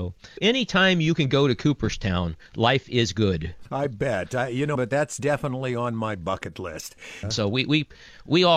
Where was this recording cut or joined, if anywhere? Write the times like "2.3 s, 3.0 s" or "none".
4.7 s, 7.2 s